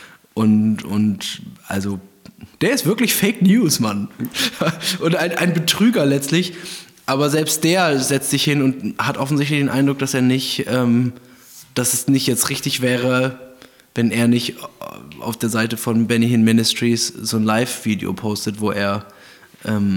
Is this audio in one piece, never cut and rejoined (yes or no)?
no